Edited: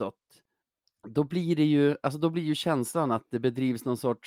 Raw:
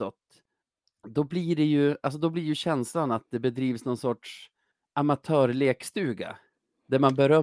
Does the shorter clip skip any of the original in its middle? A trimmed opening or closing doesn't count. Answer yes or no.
no